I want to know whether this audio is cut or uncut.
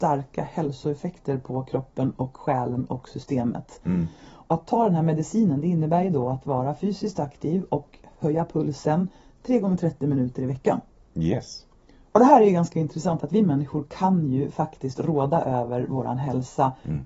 cut